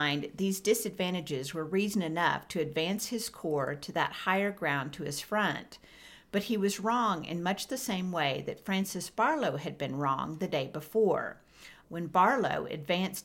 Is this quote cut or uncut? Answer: cut